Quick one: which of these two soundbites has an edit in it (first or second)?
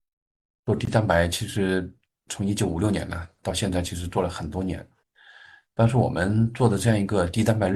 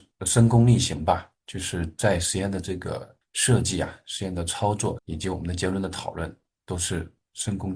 second